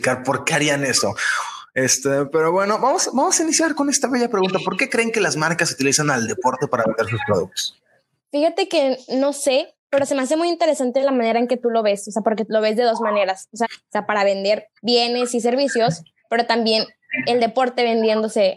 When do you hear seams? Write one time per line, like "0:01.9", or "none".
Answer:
0:13.6
0:14.8